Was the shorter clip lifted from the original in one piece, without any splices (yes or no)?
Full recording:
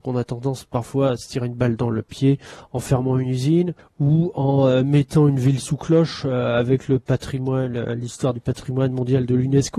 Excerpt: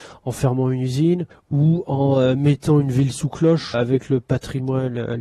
no